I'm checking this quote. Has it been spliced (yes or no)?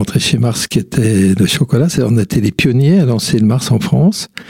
no